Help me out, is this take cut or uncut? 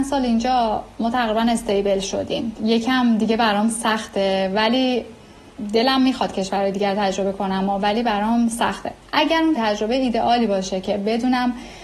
cut